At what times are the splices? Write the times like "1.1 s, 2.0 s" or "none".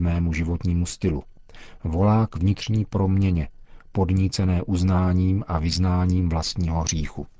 none